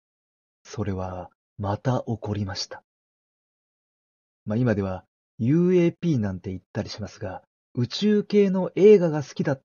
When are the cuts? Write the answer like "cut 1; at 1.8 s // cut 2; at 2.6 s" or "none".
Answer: cut 1; at 4.4 s // cut 2; at 7.6 s

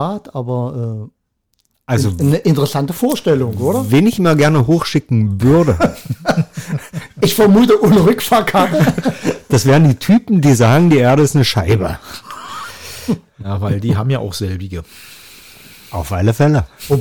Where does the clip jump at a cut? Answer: none

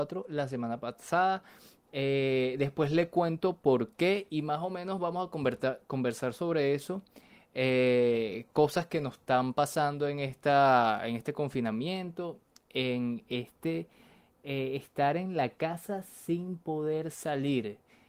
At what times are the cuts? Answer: none

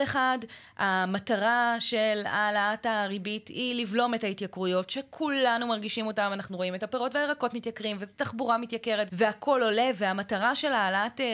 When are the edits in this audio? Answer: cut 1; at 9.1 s

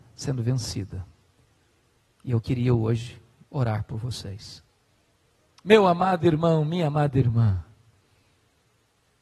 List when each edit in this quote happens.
cut 1; at 3.5 s // cut 2; at 5.6 s

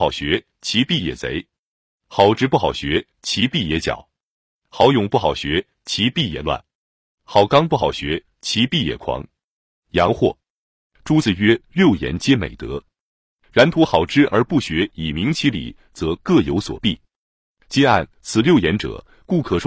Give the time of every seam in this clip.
none

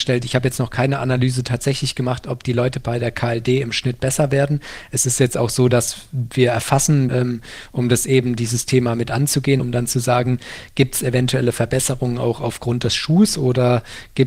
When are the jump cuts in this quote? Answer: cut 1; at 7.1 s // cut 2; at 9.6 s

